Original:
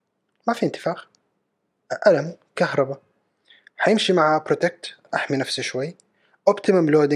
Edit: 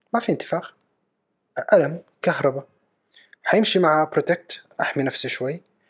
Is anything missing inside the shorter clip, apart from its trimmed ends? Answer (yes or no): no